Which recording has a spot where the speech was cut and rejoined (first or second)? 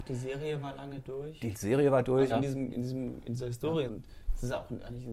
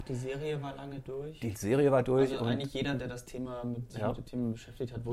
first